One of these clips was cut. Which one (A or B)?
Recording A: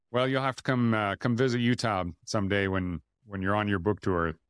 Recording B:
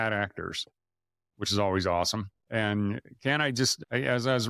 B